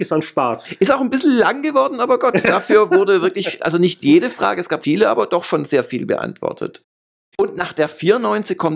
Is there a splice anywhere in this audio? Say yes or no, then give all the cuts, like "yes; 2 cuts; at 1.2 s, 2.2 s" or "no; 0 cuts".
yes; 1 cut; at 4.8 s